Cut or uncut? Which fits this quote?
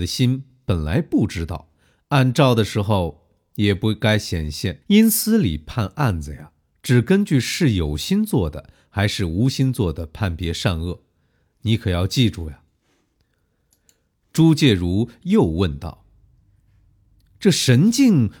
cut